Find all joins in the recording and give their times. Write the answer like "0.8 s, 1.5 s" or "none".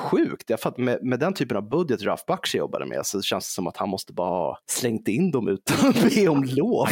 4.6 s